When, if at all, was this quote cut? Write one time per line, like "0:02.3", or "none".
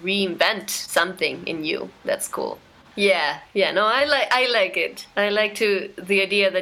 0:02.9